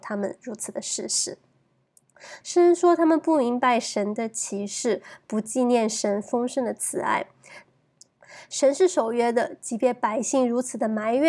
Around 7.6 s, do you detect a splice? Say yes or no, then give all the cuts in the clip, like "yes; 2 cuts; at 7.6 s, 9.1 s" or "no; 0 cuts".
yes; 2 cuts; at 2.4 s, 7.6 s